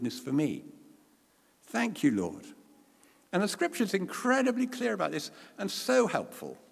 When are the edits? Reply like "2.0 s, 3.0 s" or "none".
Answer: none